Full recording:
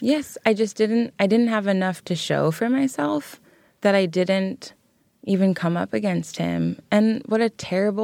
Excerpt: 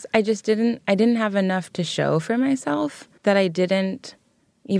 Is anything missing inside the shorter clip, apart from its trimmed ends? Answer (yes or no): yes